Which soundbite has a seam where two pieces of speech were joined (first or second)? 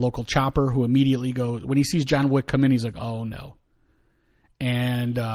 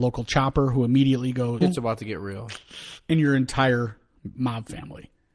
second